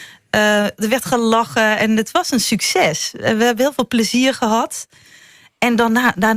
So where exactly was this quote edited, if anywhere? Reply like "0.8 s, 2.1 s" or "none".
none

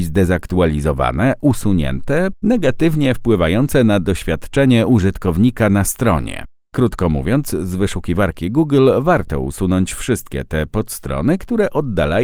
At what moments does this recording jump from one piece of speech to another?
2.3 s

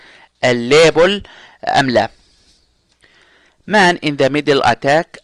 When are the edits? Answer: none

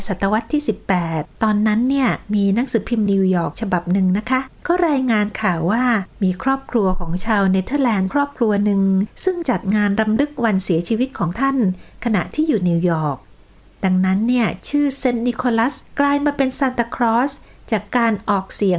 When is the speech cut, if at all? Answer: 3.1 s

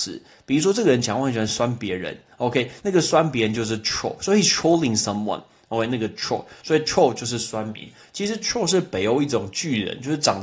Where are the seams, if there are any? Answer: none

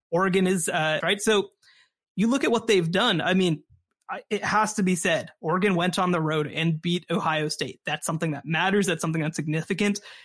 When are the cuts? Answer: 1.0 s, 4.0 s

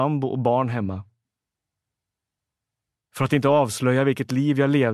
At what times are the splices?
none

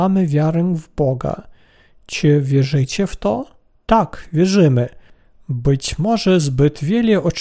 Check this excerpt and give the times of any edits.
none

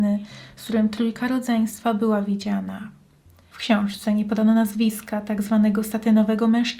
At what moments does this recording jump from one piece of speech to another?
3.5 s

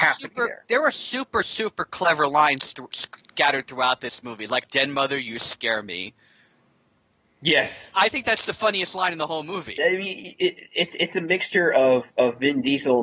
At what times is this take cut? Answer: 4.6 s, 9.8 s

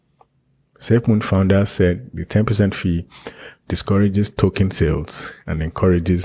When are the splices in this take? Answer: 3.6 s

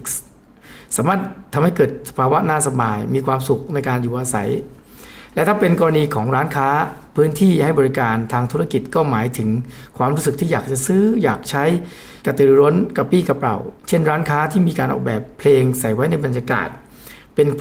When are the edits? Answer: 12.2 s, 13.8 s

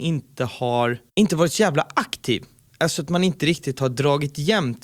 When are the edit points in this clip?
none

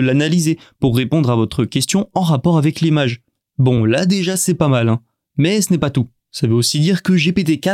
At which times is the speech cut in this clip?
none

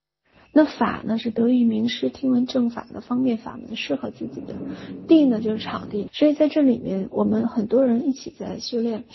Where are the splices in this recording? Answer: 6.1 s

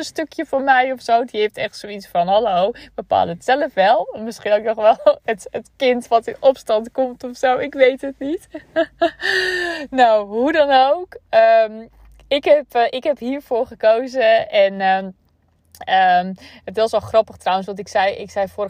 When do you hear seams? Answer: none

